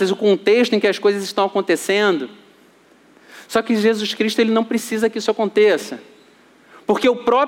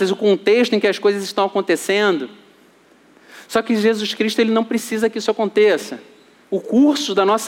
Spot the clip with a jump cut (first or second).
second